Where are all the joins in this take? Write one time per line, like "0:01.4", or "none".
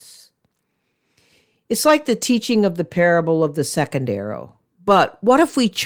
0:04.7